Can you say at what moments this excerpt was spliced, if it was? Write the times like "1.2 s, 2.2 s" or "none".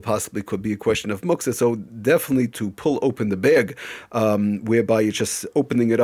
2.5 s